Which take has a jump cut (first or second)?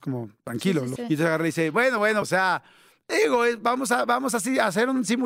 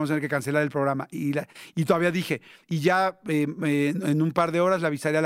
first